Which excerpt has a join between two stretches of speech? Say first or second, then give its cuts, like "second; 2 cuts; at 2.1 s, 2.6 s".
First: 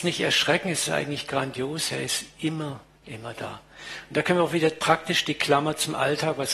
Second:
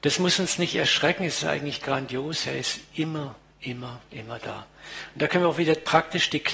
first; 1 cut; at 3.0 s